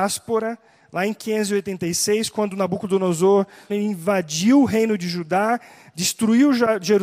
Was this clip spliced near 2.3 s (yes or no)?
no